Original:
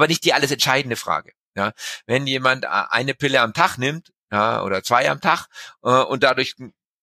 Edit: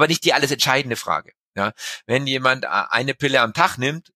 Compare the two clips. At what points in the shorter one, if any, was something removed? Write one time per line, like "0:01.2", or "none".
none